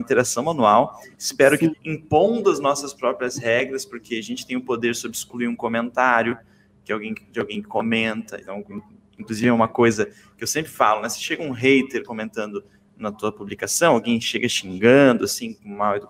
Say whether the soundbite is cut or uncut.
cut